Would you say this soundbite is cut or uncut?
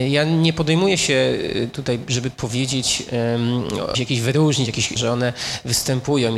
cut